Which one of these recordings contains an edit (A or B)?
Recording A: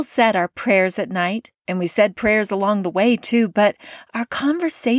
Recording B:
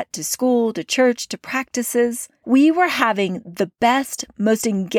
B